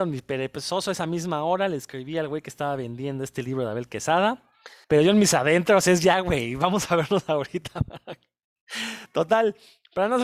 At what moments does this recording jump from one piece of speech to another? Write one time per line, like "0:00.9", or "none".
0:04.8